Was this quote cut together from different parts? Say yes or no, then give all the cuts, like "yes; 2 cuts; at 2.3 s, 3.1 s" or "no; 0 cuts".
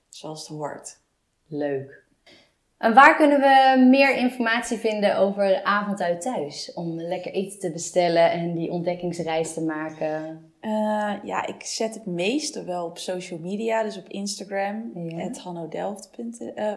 no; 0 cuts